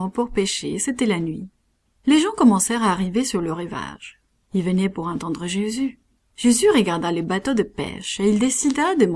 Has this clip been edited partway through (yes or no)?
no